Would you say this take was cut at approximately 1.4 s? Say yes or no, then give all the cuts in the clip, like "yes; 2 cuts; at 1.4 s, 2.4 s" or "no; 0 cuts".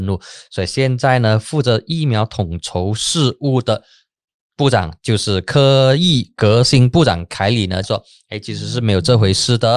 no; 1 cut; at 7.8 s